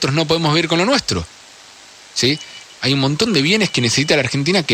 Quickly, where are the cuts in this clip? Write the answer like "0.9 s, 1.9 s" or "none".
2.7 s